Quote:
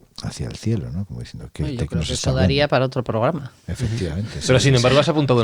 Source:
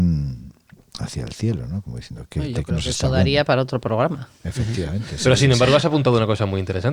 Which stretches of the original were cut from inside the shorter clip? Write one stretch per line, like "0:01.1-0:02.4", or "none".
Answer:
none